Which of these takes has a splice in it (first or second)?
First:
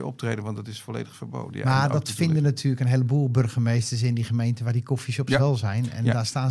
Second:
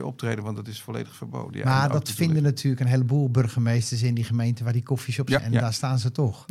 second